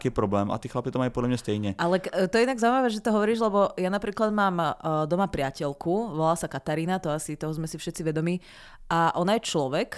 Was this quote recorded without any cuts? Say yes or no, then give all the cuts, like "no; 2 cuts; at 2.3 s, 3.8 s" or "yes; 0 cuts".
yes; 0 cuts